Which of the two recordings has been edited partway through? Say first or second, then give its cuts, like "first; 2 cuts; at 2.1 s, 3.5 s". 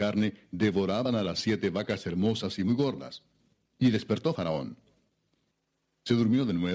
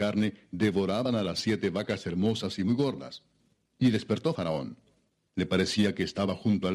second; 1 cut; at 5.3 s